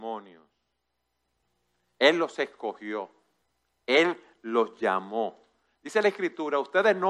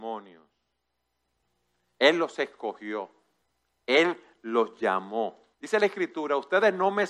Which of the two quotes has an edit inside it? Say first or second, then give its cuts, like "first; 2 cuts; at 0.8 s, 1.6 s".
second; 1 cut; at 5.5 s